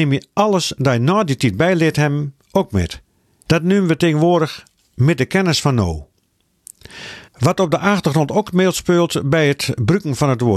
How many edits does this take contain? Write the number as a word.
two